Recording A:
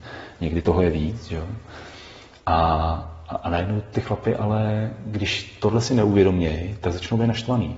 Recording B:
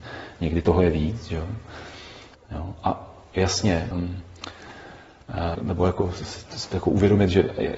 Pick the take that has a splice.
B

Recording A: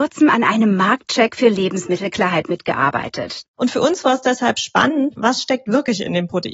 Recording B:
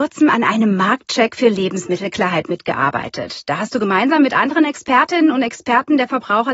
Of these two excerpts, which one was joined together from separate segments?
A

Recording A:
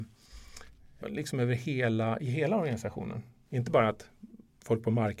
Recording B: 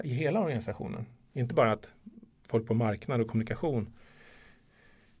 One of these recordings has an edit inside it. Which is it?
A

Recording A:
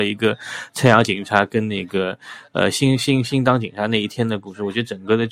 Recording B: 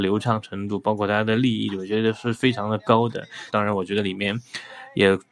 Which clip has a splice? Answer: B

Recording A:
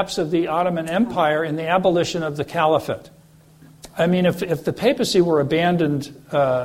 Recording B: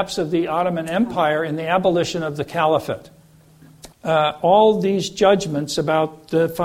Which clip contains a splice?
B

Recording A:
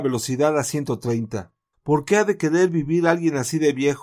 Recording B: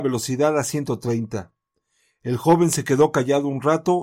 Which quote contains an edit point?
A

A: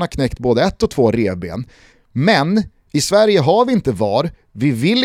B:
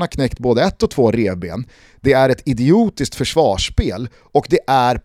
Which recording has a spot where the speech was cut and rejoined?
A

